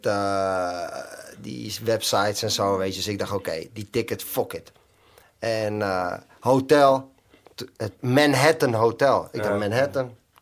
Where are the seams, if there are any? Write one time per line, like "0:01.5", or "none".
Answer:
0:08.0

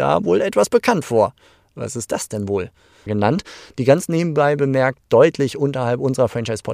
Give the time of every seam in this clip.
0:03.1

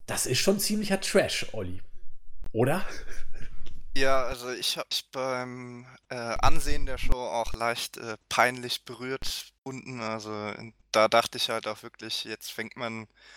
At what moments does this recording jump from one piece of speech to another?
0:09.6

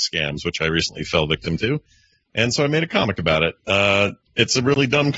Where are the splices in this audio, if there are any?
none

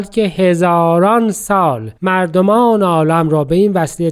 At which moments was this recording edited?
0:02.0

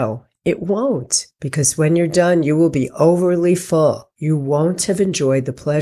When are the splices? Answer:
none

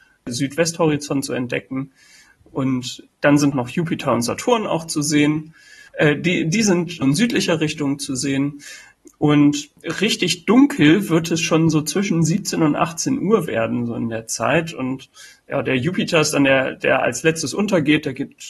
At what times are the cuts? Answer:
0:07.0

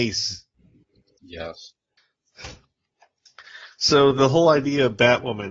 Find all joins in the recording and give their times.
0:01.2

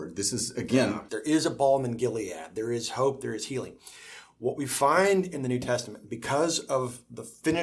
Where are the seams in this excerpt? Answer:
0:01.1

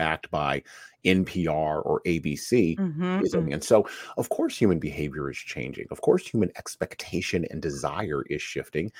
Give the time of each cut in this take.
0:03.5

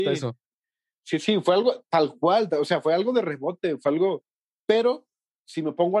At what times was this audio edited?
0:04.6

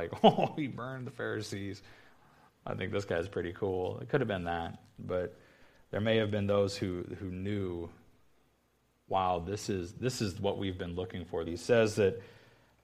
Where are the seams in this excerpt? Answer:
0:11.5

